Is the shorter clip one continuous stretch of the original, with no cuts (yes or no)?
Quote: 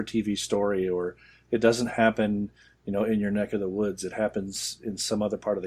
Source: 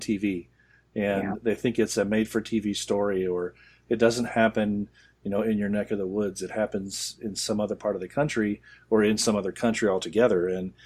yes